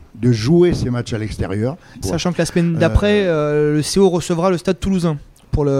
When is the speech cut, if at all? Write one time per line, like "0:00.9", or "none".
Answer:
0:02.0